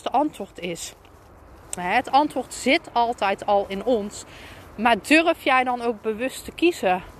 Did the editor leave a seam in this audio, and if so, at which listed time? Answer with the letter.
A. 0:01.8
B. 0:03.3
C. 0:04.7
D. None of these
A